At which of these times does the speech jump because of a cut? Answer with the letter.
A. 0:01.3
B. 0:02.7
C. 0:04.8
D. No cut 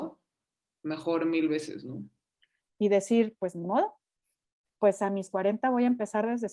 B